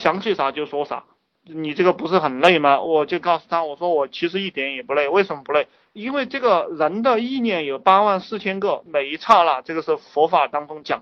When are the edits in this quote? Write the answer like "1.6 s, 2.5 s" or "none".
1.3 s